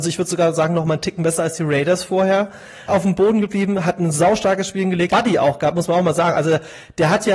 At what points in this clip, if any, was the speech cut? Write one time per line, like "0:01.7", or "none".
0:02.9
0:05.1